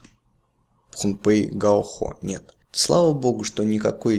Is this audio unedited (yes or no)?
no